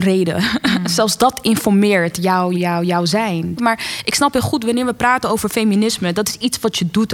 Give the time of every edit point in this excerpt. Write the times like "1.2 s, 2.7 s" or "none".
2.5 s, 3.6 s